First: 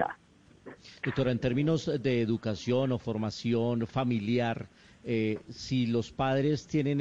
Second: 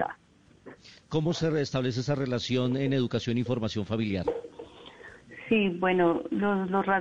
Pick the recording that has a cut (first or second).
second